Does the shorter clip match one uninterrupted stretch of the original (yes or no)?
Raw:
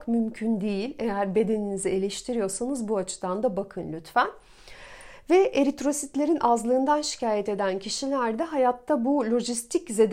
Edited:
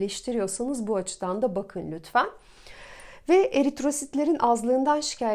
yes